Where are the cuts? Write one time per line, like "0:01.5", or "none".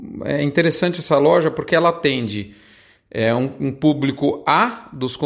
none